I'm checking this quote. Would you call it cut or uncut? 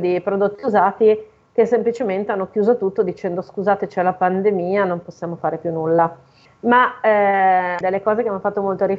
cut